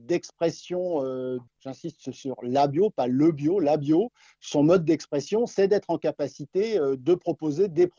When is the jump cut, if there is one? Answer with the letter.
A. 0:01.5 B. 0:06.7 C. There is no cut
A